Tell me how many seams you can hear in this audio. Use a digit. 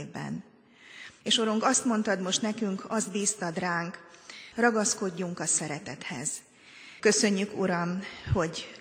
3